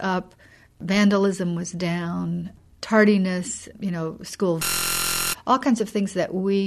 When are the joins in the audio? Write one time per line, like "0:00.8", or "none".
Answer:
0:03.7